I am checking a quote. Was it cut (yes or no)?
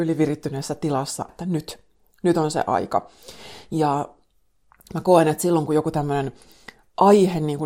yes